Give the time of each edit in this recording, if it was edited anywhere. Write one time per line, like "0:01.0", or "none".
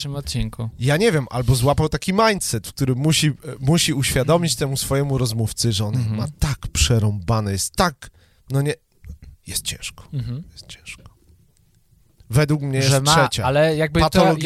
0:12.2

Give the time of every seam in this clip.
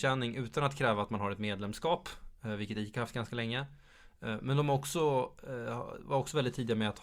none

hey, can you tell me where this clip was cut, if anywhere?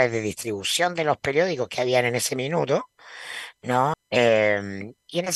0:03.9

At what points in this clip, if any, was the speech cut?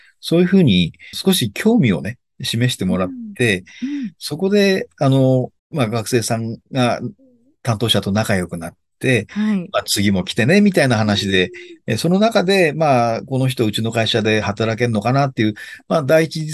0:01.1
0:05.6

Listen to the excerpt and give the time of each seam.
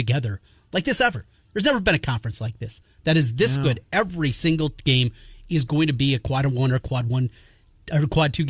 none

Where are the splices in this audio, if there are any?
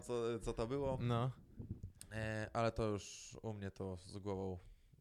none

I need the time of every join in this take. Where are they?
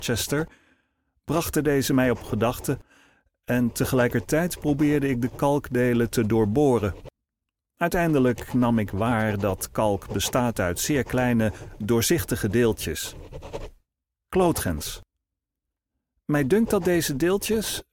none

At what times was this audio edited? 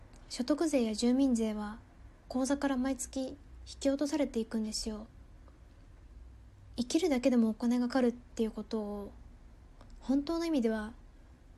0:07.9

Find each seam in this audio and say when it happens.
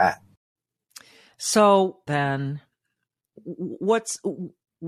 0:02.1

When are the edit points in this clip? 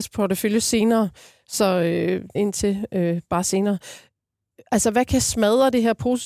0:02.3

